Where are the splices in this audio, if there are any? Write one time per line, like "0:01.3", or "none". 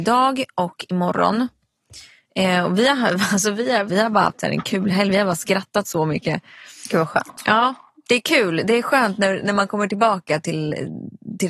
0:03.9